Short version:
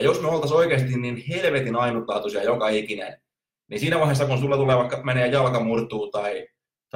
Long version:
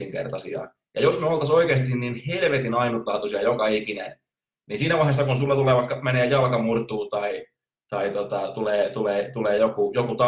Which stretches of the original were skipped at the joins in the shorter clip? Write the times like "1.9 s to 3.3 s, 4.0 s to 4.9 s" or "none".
none